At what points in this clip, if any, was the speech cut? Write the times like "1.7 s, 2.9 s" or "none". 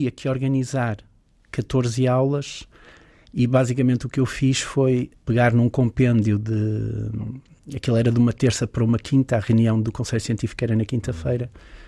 none